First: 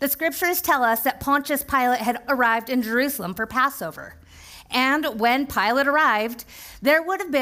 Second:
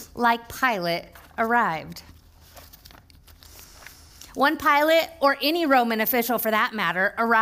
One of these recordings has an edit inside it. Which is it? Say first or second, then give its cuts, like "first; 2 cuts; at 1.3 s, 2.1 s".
first; 1 cut; at 2.3 s